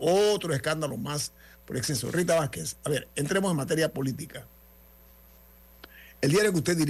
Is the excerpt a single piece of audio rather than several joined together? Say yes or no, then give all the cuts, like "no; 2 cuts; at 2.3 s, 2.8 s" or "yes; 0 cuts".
yes; 0 cuts